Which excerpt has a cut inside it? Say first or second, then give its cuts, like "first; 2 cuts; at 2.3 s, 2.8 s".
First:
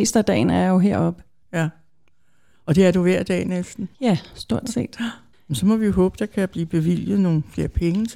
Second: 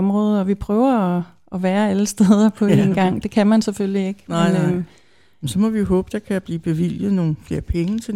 first; 2 cuts; at 3.9 s, 5.3 s